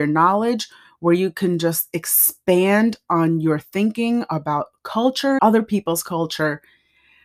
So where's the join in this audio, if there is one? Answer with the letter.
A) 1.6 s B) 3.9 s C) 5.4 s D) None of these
C